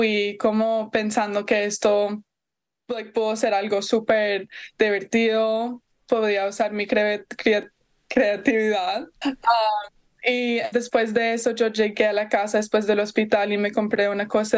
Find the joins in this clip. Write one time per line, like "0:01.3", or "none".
0:09.2
0:10.7